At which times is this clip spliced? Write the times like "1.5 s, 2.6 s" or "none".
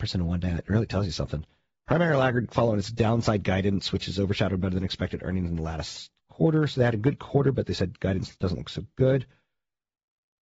none